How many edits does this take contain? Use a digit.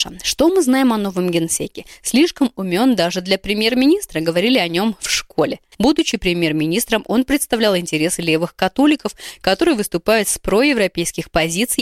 1